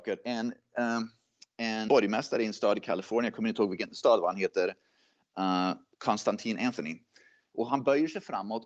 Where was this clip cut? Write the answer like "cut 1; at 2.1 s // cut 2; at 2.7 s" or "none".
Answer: cut 1; at 1.9 s // cut 2; at 7.5 s